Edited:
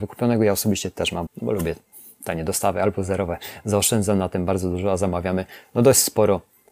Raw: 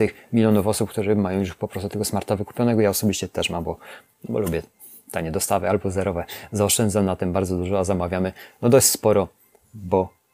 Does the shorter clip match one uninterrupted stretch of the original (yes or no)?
no